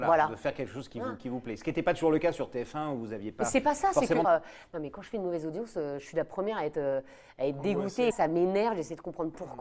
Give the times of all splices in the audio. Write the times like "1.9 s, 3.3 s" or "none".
4.2 s, 8.1 s